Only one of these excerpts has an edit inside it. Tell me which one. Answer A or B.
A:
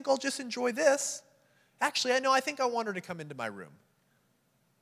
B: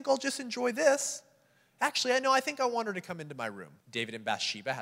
B